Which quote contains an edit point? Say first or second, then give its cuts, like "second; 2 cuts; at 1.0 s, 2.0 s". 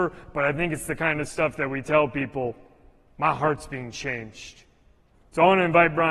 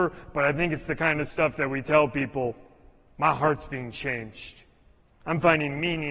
first; 1 cut; at 5.1 s